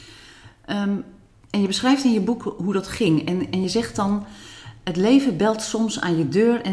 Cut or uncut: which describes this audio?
uncut